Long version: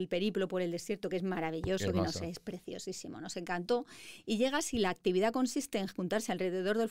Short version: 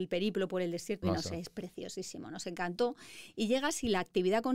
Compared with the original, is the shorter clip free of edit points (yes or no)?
no